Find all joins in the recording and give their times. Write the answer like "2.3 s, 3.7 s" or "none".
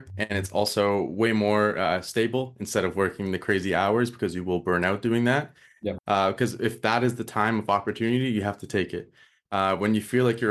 6.0 s, 9.5 s

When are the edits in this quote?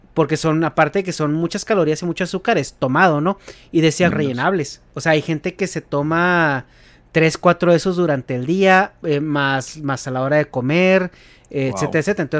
4.1 s

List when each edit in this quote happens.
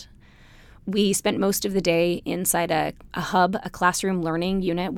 3.1 s

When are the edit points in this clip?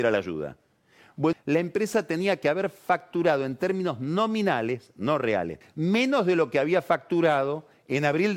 1.3 s, 5.6 s

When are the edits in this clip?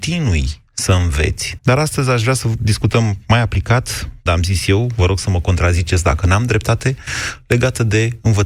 1.6 s, 4.3 s

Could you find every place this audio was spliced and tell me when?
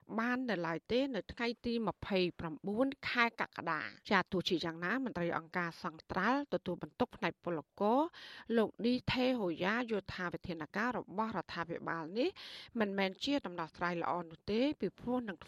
4.0 s

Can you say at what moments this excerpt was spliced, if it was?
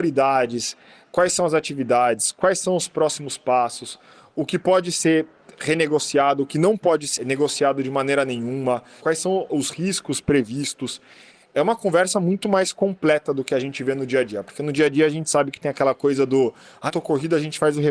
9.0 s, 16.9 s

